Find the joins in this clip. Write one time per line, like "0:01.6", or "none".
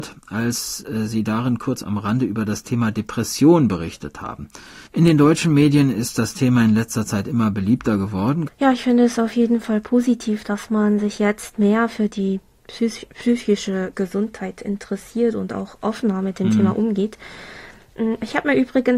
0:04.9
0:08.5